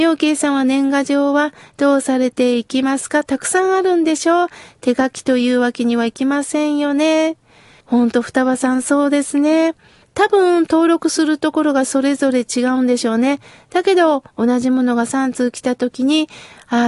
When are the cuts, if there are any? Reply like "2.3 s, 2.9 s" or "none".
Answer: 7.8 s, 10.0 s